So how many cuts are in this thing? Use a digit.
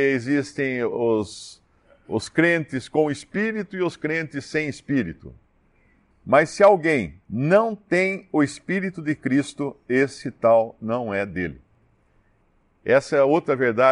2